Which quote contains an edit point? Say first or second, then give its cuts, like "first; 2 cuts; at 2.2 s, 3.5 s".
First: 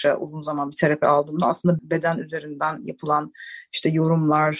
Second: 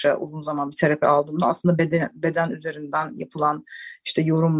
first; 1 cut; at 1.8 s